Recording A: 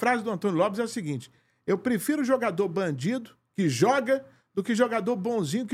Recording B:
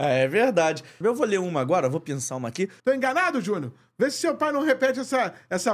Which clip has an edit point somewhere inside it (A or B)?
B